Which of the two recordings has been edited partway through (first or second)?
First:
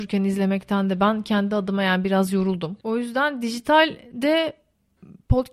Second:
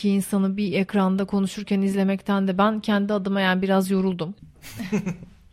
second